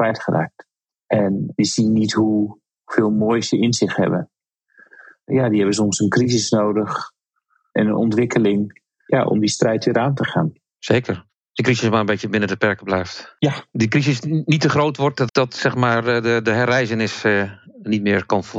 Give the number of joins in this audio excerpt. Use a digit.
1